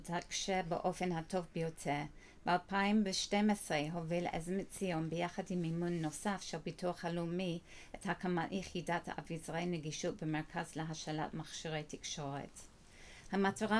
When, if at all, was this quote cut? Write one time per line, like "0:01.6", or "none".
none